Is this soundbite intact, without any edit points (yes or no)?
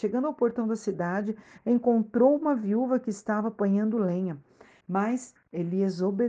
no